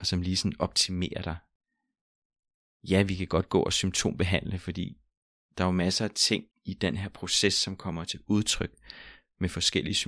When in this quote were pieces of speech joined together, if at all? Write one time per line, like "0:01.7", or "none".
0:06.5